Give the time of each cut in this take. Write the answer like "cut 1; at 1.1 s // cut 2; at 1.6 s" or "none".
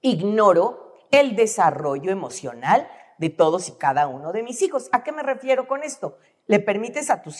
none